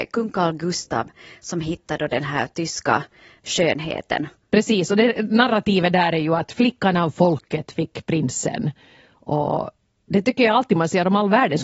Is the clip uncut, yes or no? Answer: yes